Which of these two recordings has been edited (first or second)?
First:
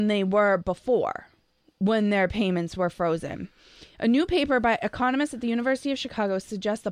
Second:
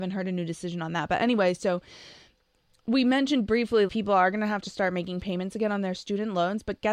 second